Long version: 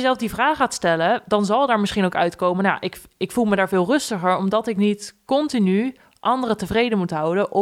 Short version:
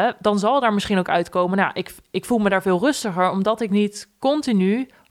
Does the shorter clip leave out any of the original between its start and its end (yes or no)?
no